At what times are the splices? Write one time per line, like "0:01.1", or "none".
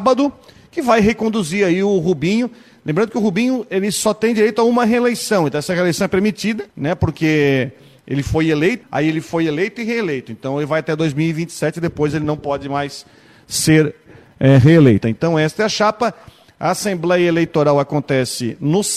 0:06.7
0:08.8
0:15.0